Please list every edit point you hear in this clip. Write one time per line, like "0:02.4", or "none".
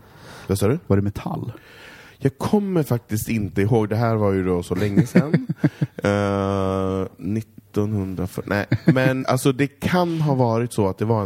0:09.2

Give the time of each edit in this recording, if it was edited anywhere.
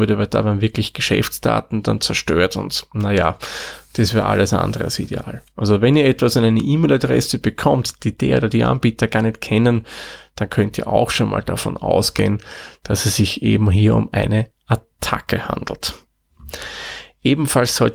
none

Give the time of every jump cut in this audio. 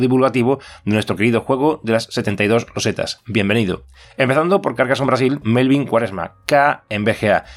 0:04.0
0:05.4

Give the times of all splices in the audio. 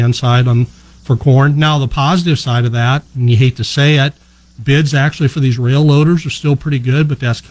none

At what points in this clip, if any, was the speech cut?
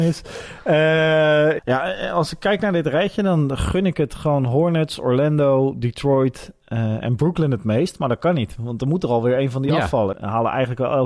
0:01.6
0:10.1

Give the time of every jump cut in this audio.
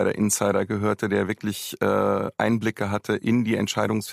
none

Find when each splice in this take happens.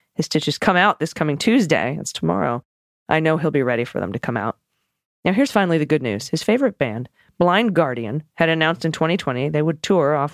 none

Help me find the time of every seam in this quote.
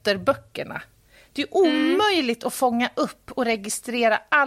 none

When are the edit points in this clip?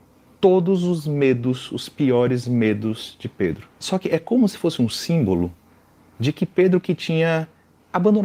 0:03.8

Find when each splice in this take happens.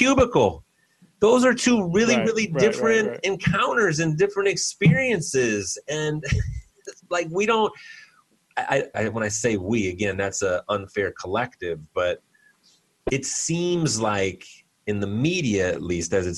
0:08.9

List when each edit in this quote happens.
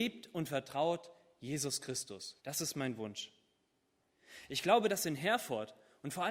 0:02.4

